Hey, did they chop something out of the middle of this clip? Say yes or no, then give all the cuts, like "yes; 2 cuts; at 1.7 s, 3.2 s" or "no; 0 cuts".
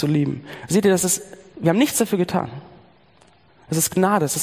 no; 0 cuts